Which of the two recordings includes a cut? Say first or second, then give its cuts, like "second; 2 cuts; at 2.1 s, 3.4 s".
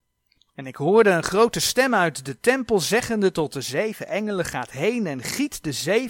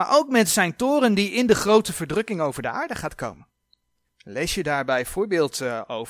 second; 1 cut; at 4.0 s